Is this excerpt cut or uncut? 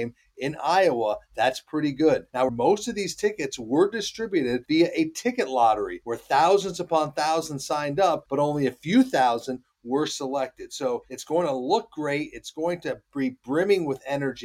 cut